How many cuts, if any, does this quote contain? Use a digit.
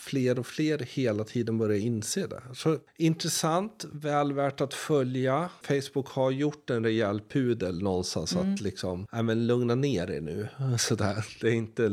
0